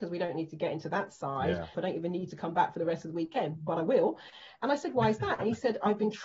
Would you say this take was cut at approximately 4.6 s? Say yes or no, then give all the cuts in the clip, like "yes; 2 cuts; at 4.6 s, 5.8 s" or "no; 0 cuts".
no; 1 cut; at 1.7 s